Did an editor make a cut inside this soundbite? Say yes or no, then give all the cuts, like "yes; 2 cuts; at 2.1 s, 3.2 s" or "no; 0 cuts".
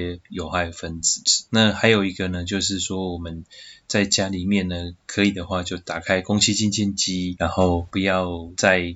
no; 0 cuts